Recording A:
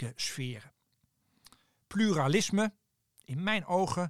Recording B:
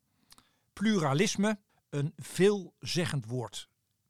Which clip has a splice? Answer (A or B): B